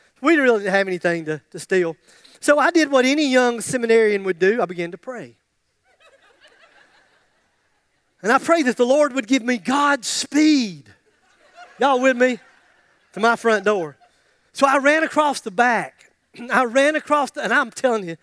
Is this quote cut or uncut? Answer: uncut